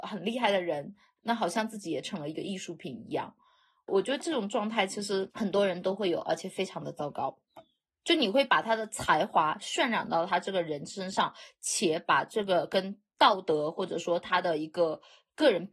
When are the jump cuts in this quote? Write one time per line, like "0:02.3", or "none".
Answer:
0:01.2